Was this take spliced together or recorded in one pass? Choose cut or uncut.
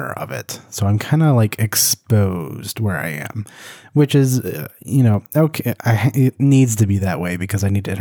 uncut